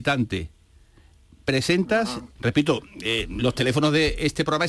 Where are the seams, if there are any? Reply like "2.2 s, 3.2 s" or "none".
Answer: 2.4 s